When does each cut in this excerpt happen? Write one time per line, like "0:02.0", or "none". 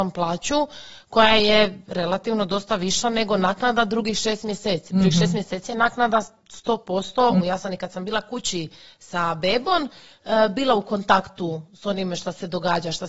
0:07.4